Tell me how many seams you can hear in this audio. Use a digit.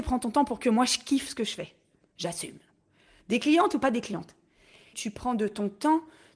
2